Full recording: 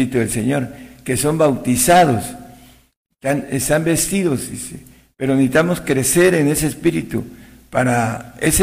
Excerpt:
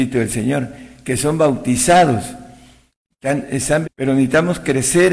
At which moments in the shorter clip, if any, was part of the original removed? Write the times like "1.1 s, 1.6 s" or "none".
3.8 s